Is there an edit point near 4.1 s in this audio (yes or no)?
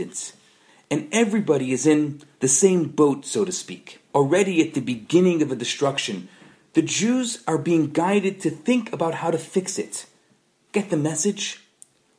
yes